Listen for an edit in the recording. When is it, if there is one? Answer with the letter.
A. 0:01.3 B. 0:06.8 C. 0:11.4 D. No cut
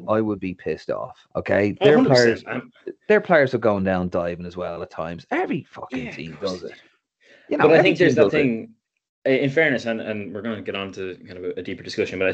A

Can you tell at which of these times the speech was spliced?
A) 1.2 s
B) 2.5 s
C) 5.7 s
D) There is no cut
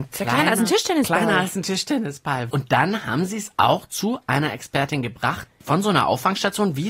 B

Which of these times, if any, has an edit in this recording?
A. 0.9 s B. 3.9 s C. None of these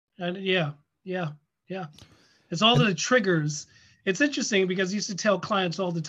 C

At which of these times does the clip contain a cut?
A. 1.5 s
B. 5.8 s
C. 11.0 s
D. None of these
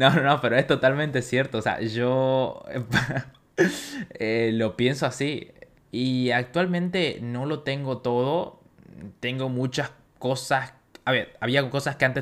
B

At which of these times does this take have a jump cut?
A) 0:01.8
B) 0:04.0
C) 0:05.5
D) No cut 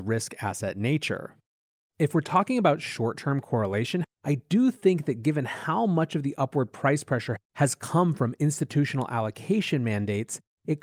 B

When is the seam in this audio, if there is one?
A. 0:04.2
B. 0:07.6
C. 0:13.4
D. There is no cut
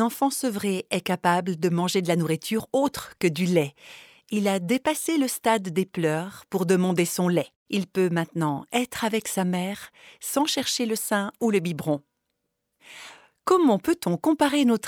B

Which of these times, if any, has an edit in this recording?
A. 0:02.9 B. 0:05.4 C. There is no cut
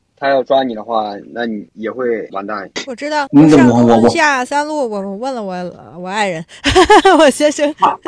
A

